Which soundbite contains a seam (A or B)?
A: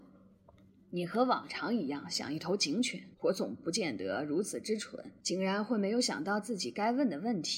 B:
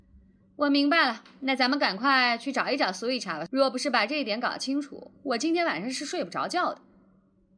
A